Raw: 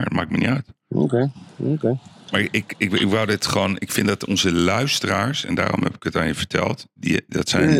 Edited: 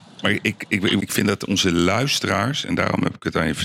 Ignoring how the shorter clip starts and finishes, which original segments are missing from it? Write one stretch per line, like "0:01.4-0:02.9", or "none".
0:03.1-0:03.8